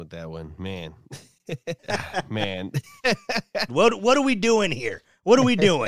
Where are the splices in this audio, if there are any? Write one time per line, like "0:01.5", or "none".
0:01.8
0:03.7